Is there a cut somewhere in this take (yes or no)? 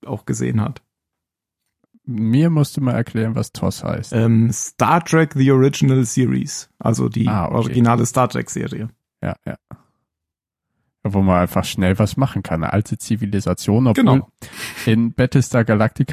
no